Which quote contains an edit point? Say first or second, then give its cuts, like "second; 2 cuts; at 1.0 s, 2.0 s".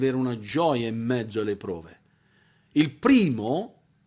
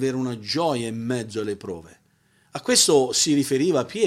second; 1 cut; at 2.4 s